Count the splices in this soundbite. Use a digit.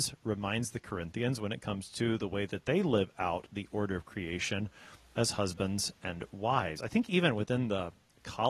0